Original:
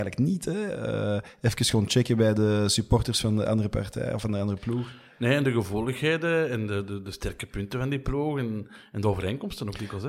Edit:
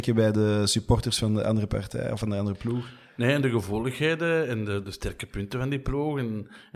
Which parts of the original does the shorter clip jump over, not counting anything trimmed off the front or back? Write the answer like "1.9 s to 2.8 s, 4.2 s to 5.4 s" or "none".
6.9 s to 7.0 s